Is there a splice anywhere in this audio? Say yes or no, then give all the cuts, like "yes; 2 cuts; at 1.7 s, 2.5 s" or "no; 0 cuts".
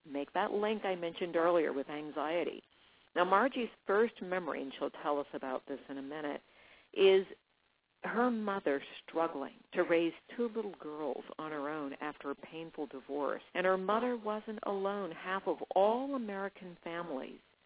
yes; 2 cuts; at 9.6 s, 13.5 s